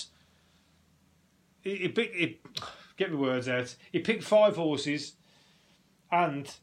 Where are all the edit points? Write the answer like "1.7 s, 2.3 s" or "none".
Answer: none